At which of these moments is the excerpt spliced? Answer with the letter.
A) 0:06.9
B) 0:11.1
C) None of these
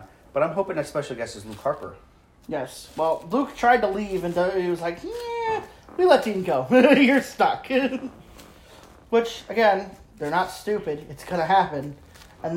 C